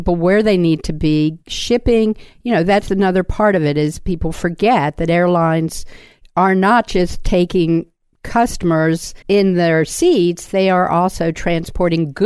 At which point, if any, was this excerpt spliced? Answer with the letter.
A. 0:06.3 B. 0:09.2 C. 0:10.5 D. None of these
B